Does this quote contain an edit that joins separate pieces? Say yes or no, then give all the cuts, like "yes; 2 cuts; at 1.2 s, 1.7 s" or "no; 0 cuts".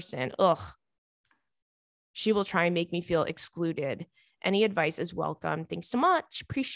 no; 0 cuts